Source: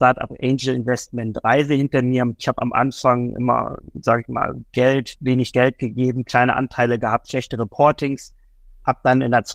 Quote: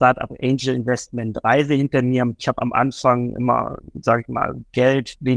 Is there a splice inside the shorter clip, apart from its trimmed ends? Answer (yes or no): no